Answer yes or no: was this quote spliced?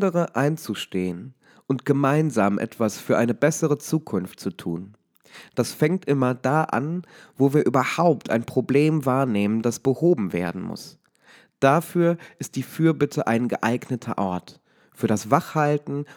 no